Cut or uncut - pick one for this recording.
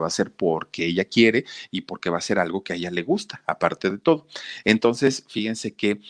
uncut